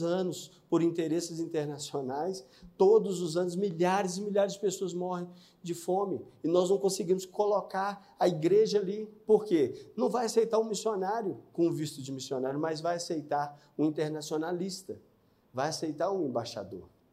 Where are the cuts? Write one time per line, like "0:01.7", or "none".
none